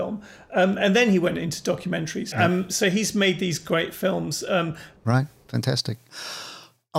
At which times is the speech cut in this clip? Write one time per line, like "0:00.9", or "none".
0:02.3
0:05.0